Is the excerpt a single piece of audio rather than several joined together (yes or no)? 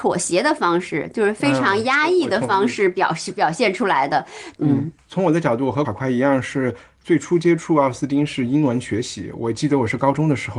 no